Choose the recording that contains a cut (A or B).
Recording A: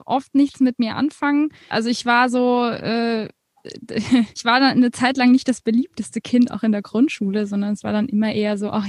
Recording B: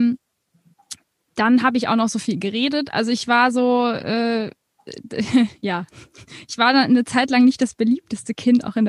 A